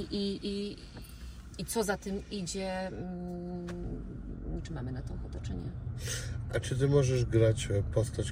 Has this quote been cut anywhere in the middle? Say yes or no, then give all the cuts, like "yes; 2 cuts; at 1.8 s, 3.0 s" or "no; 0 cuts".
yes; 1 cut; at 4.6 s